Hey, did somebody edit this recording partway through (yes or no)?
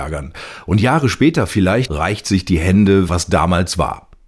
yes